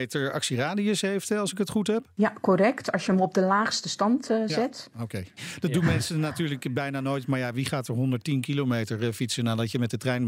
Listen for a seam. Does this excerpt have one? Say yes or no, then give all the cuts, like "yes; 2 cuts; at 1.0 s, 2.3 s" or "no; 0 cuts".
yes; 1 cut; at 5.4 s